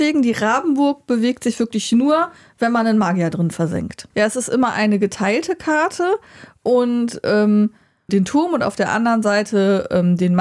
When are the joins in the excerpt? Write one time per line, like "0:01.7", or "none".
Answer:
0:04.1
0:08.1